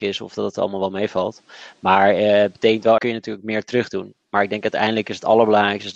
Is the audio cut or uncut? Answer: cut